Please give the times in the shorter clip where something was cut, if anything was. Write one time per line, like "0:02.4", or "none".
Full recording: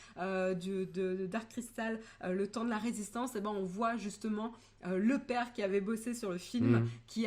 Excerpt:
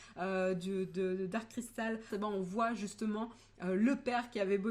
0:02.1

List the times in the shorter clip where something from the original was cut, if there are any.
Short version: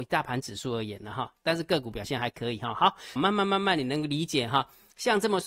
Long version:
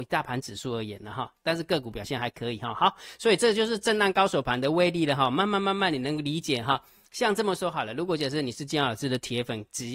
0:03.2

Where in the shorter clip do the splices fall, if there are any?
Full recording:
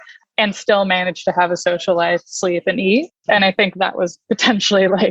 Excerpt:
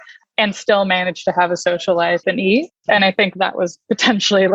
0:02.2

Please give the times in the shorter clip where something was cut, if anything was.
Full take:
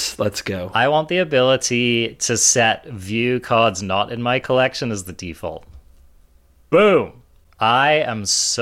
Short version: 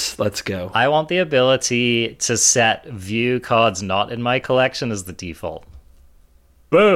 none

